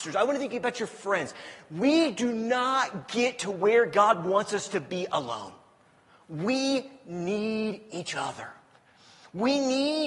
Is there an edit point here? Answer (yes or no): no